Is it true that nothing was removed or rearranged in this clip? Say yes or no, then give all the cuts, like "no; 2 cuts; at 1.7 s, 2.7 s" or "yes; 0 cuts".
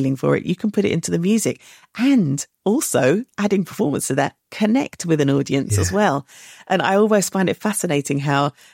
yes; 0 cuts